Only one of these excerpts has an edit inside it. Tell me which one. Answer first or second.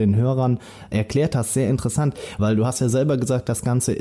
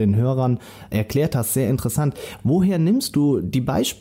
first